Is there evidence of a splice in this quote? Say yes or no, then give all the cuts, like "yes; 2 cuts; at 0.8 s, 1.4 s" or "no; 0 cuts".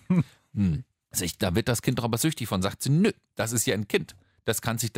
no; 0 cuts